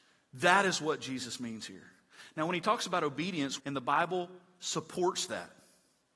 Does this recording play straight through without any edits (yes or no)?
no